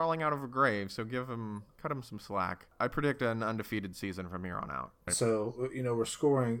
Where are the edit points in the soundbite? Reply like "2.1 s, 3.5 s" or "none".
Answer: 5.1 s

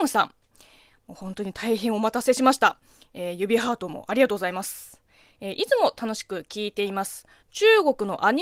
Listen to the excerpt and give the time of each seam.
none

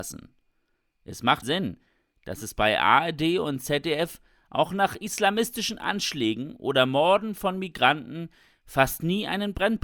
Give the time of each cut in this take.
1.4 s

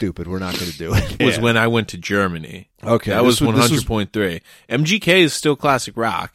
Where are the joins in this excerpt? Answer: 1.2 s

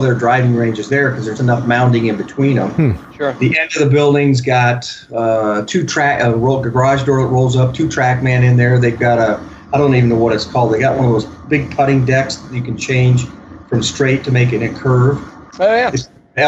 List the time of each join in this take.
1.4 s

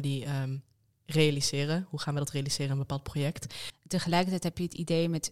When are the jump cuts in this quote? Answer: 3.7 s

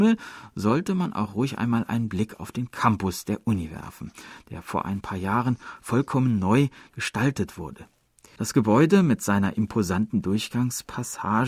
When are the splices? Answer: 8.4 s

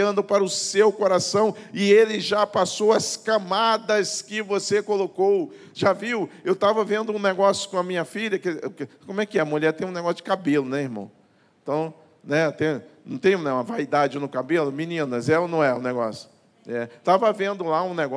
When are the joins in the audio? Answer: none

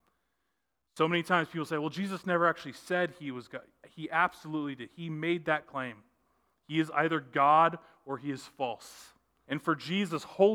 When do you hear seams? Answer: 9.4 s

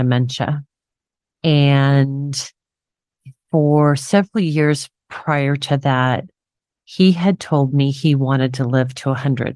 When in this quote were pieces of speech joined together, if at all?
1.2 s

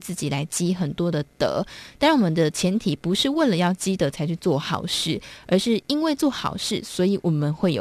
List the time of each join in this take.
none

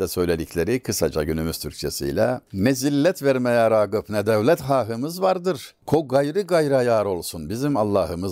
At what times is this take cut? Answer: none

